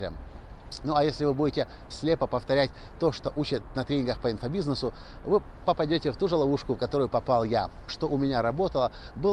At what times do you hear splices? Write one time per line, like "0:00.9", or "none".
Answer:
0:01.9
0:07.9